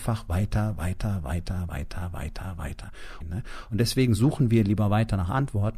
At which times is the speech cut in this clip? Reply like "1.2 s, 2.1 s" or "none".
1.7 s, 3.2 s